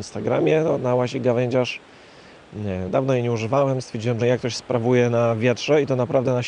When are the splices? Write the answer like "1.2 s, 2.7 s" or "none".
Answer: 2.9 s, 4.2 s